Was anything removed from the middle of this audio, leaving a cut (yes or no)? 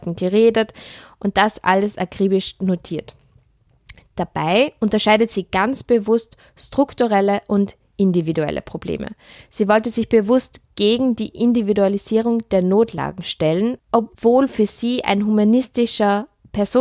yes